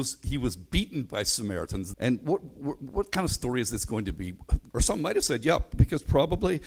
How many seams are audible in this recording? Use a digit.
2